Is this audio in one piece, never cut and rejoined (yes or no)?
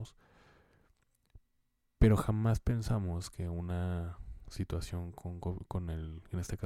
yes